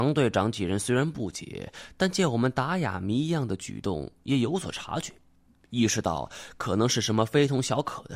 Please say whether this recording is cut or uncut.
uncut